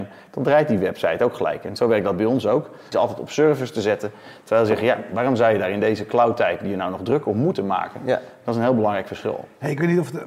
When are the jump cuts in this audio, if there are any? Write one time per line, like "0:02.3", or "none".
0:02.9